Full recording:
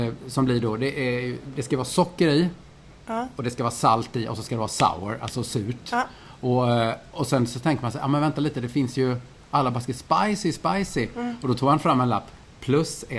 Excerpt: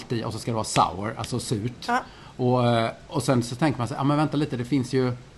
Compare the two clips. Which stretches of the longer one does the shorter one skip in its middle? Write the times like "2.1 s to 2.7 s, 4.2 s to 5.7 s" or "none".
none